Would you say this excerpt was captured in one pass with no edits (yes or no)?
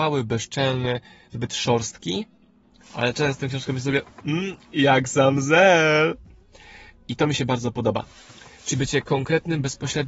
yes